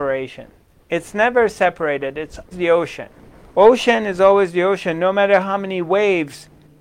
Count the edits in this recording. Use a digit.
1